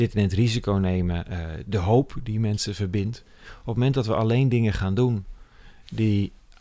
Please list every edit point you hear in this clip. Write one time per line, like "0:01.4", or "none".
none